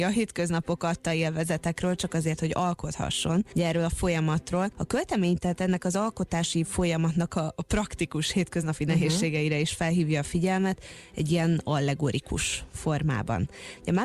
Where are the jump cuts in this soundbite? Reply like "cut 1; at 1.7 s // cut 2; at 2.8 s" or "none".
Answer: cut 1; at 4.7 s